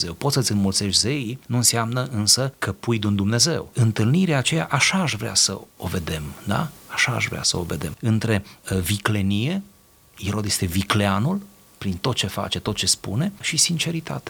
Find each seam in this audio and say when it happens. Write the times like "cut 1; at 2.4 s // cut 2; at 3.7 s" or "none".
cut 1; at 3.7 s